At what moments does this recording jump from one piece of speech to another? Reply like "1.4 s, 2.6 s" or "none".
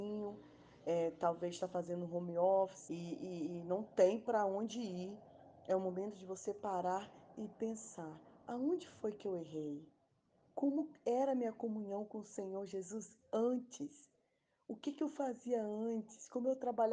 2.9 s